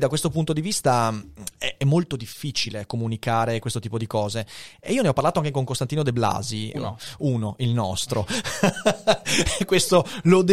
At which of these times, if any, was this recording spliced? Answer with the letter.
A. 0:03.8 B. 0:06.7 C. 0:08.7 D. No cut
B